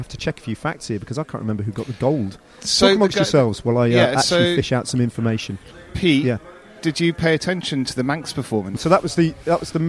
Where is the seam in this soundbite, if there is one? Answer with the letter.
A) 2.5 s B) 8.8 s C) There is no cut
B